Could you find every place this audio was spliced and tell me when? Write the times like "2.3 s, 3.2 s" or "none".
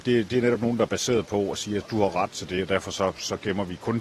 none